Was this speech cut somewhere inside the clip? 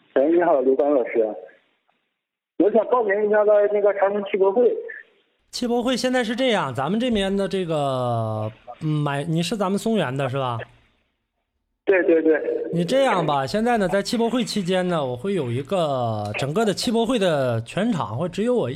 no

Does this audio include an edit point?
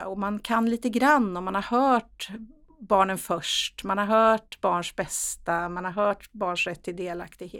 no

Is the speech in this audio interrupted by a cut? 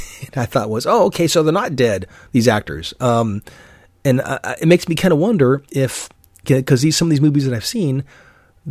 no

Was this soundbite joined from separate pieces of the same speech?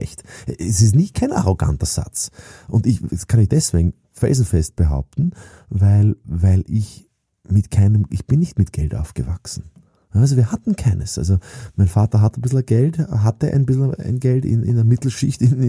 no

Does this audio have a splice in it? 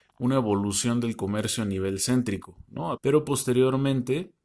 yes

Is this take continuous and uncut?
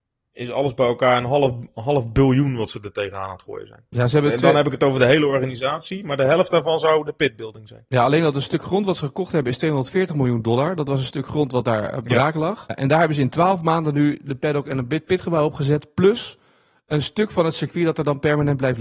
no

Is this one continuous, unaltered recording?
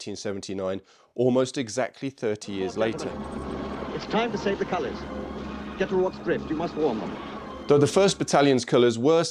yes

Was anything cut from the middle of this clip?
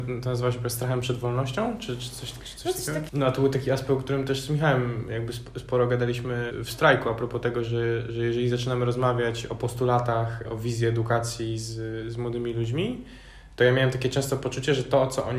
yes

